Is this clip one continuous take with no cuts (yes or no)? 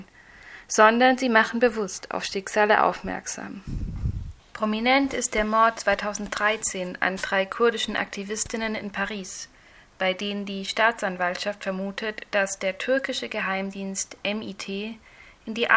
yes